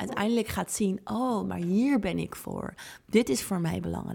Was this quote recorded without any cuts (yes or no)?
yes